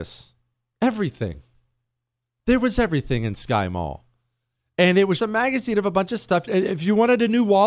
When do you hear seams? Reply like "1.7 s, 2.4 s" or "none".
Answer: 5.2 s, 6.5 s